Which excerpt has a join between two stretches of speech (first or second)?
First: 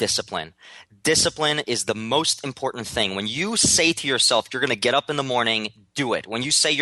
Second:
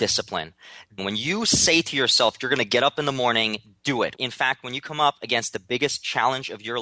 second